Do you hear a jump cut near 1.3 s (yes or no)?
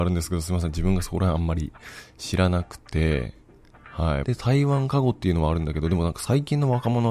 no